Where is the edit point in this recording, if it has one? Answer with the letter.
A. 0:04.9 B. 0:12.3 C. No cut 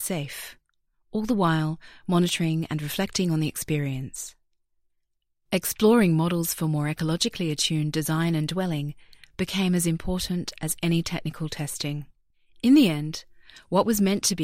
C